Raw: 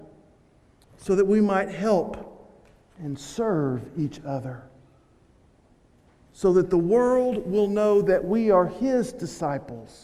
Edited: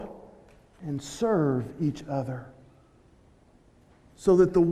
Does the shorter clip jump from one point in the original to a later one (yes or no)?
no